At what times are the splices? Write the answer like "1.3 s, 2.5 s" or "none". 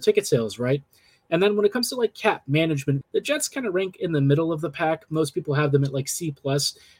3.0 s